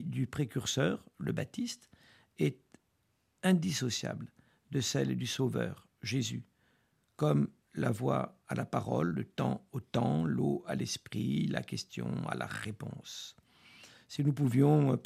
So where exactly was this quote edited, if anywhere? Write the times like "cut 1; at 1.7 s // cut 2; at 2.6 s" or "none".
none